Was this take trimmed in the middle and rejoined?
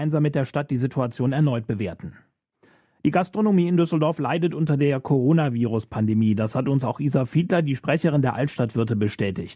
no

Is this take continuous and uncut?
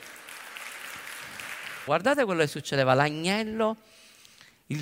no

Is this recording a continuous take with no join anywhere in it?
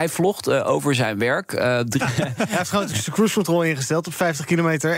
no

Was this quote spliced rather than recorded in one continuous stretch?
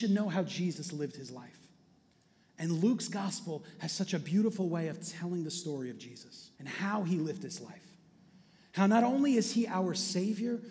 yes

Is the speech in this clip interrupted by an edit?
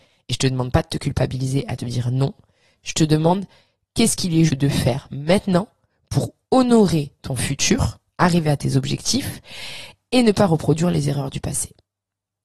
yes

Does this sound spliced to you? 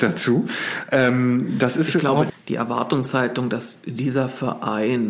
yes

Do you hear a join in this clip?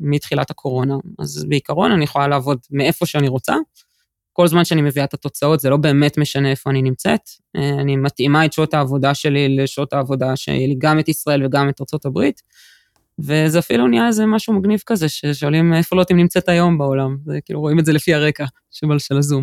no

